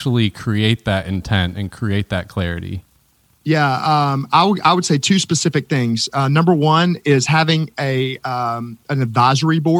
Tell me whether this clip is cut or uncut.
uncut